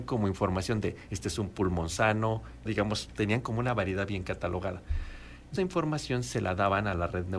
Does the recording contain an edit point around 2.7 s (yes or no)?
yes